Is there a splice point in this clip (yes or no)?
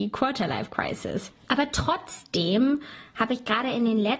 yes